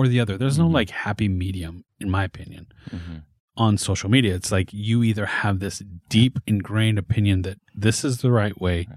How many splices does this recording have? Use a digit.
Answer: 0